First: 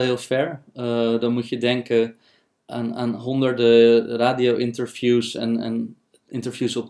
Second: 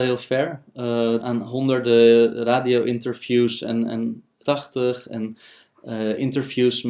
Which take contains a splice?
second; 2 cuts; at 1.2 s, 4.4 s

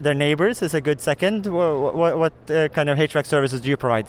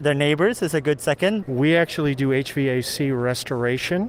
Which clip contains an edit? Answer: second; 1 cut; at 1.4 s

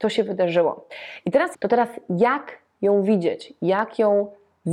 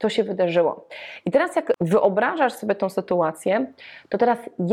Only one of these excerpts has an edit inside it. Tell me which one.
first; 1 cut; at 1.5 s

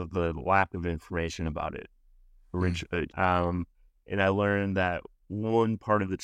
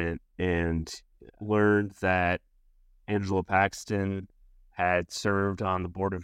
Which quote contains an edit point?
first; 1 cut; at 3.1 s

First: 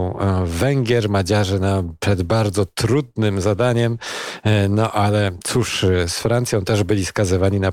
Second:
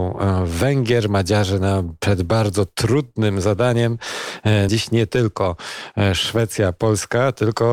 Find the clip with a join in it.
second; 1 cut; at 4.7 s

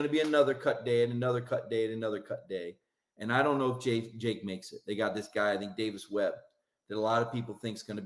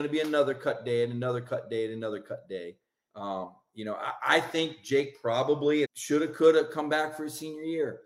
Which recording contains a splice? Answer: second; 2 cuts; at 3.1 s, 5.8 s

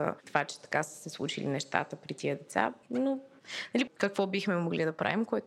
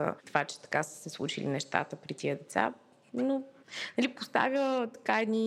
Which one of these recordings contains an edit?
first; 2 cuts; at 2.8 s, 3.9 s

